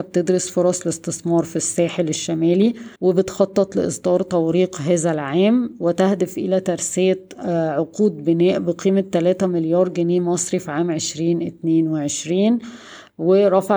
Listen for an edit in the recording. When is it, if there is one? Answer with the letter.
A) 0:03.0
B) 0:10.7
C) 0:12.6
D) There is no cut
A